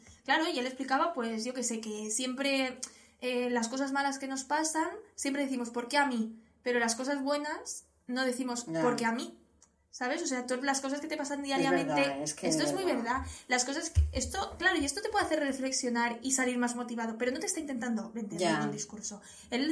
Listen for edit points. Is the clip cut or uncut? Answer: uncut